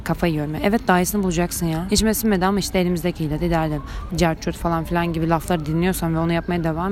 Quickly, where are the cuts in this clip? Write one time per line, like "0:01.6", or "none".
0:01.9
0:04.1

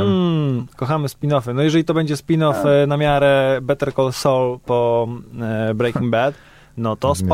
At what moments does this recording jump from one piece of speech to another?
none

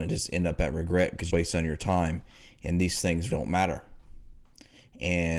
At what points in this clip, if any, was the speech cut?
0:01.3
0:03.3

